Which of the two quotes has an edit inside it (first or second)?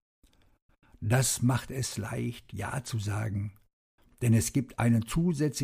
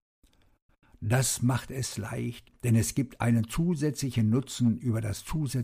second